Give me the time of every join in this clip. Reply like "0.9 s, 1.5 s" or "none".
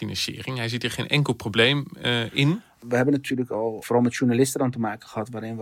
3.8 s